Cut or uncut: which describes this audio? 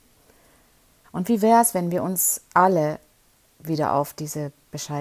cut